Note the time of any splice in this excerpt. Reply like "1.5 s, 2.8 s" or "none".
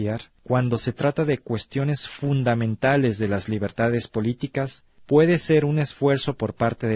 none